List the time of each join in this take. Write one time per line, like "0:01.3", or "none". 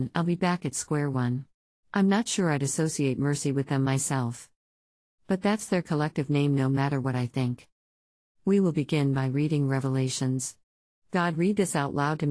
0:01.8